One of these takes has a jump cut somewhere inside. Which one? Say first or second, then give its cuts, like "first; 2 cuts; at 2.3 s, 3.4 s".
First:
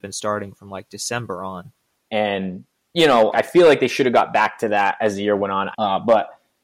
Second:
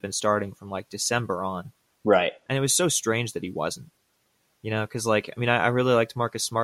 first; 3 cuts; at 2.0 s, 3.3 s, 5.7 s